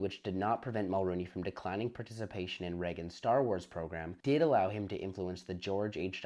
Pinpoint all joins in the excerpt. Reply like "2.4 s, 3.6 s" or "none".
4.2 s